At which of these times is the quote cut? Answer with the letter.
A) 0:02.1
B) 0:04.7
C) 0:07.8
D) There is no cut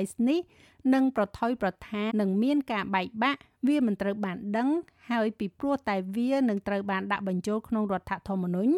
A